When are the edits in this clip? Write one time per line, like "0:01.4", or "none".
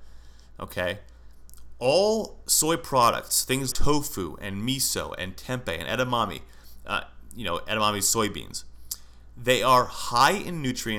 0:03.7